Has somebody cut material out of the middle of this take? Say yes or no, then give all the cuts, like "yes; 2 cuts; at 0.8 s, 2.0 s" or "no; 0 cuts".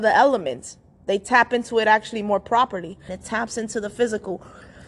yes; 1 cut; at 3.1 s